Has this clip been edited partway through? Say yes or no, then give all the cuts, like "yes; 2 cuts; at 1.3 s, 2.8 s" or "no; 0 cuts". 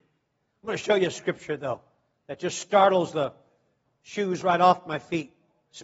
yes; 1 cut; at 3.9 s